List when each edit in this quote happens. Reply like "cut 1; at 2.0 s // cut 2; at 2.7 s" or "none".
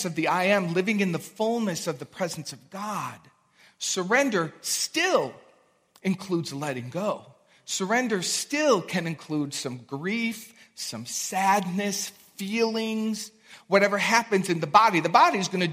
none